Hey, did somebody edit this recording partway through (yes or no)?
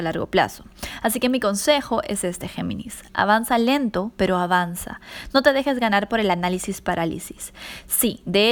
no